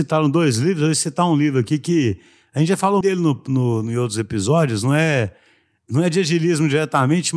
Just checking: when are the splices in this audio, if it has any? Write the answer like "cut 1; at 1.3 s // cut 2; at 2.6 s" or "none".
cut 1; at 3.0 s